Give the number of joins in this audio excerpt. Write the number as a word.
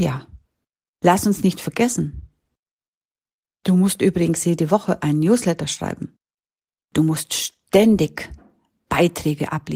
zero